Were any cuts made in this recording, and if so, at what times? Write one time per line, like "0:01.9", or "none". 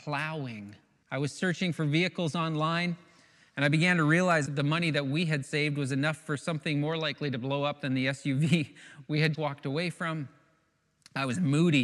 0:01.0
0:04.5
0:09.3